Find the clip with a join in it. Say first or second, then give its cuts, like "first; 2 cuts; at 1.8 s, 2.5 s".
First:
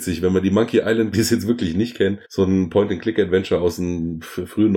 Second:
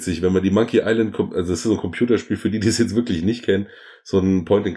first; 2 cuts; at 1.1 s, 2.2 s